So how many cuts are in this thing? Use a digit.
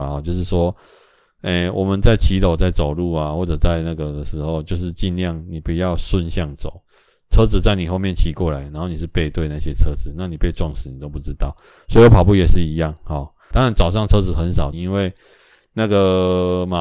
2